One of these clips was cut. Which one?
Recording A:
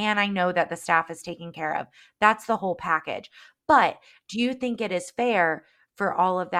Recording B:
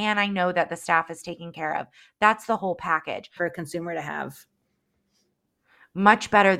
B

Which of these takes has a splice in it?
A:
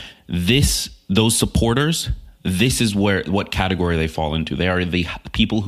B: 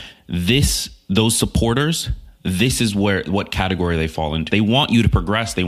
B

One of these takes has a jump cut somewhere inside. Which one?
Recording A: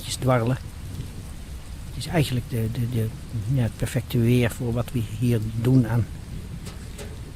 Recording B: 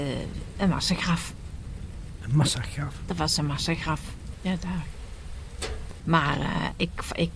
B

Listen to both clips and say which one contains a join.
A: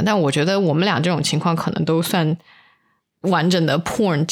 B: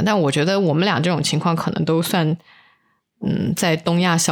A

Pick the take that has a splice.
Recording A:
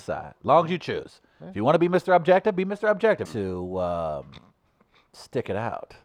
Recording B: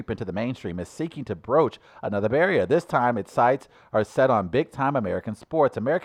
A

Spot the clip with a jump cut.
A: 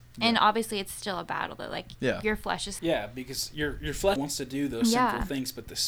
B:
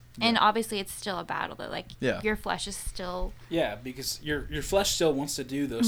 A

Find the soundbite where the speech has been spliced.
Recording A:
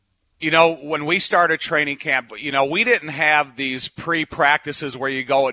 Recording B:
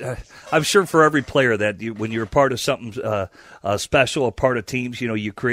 A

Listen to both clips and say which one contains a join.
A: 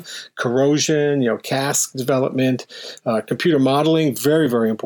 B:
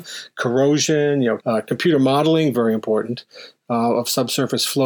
B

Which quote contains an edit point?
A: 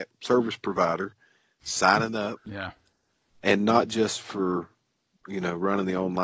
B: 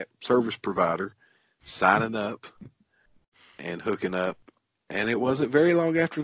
A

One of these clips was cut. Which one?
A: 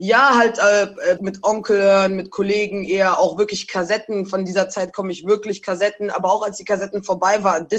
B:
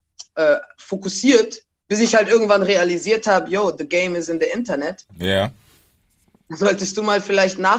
A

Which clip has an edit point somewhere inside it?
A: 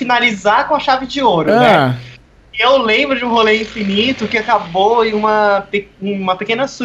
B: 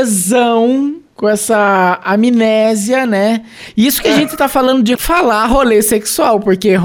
B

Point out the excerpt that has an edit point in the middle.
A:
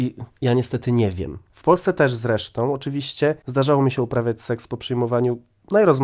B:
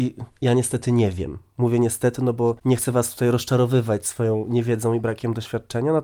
A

